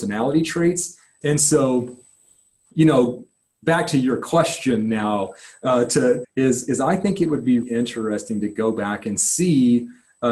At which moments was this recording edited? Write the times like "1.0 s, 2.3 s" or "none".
1.2 s, 6.2 s, 7.6 s